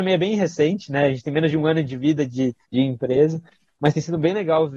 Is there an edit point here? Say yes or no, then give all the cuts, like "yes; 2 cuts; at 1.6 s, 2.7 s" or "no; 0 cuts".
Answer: yes; 1 cut; at 2.6 s